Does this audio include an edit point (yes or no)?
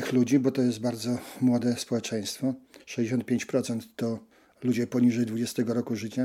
no